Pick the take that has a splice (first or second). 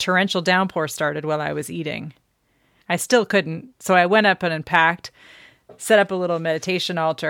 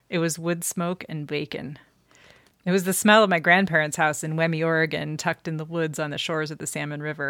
first